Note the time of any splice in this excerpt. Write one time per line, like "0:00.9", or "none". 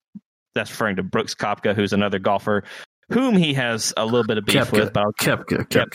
none

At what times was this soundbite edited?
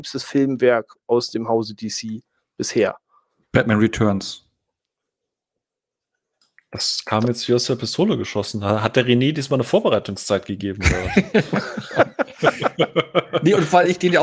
none

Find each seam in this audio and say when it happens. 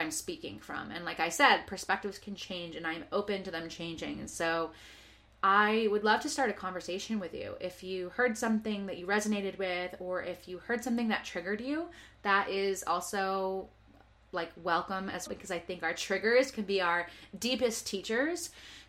0:15.3

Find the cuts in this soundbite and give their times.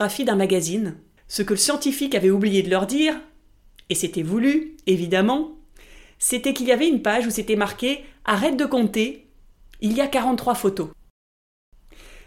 0:01.2

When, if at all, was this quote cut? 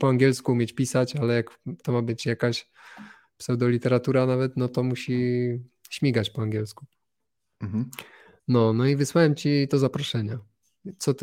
0:04.7

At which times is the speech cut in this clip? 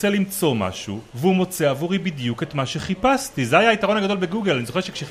0:01.1

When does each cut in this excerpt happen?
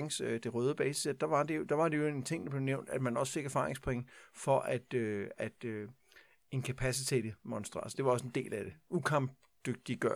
none

